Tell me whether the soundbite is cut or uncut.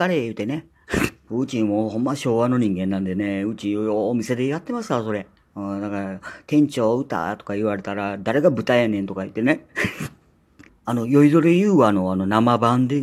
cut